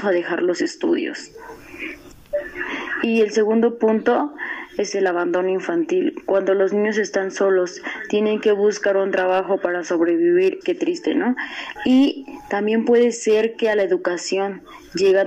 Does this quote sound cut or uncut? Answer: cut